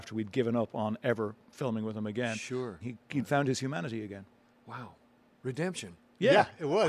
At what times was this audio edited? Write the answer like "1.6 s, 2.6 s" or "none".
2.8 s

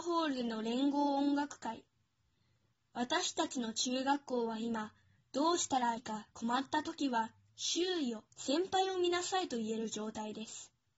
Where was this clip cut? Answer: 6.0 s, 8.3 s

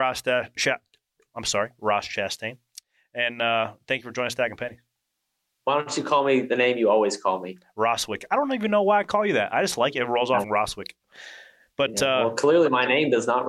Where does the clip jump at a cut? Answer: 10.4 s

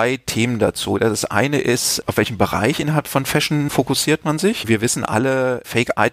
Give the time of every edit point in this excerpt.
none

